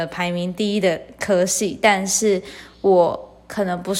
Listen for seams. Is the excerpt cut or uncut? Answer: uncut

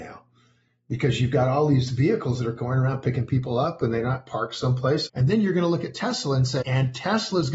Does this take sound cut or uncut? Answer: cut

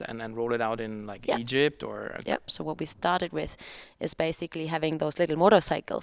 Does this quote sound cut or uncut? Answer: cut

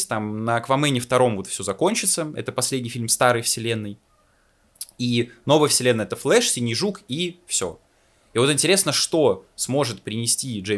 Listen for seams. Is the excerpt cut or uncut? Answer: uncut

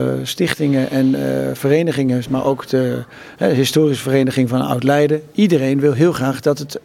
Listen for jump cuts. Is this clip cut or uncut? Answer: cut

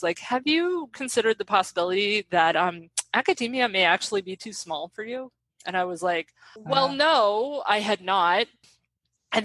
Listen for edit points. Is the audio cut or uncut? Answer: uncut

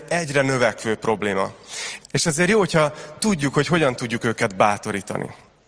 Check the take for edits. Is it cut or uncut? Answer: cut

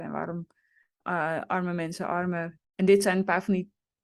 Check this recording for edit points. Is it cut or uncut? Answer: cut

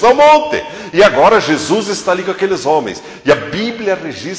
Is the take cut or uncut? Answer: uncut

